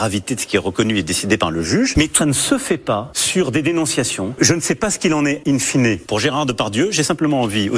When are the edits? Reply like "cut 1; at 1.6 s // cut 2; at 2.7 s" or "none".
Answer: cut 1; at 2.2 s